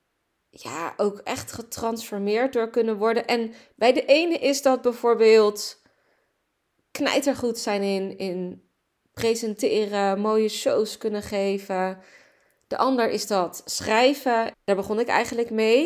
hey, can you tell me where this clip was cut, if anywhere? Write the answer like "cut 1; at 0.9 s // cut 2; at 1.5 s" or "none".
cut 1; at 14.5 s